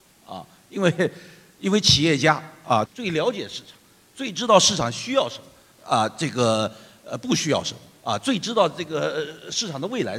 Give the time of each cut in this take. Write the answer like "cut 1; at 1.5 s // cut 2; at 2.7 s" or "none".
cut 1; at 2.9 s